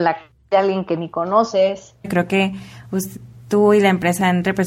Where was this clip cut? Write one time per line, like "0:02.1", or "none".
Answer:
0:02.0